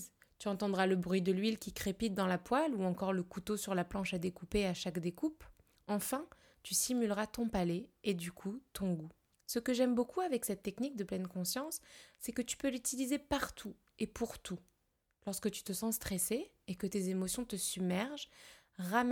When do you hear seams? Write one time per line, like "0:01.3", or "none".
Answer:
0:06.5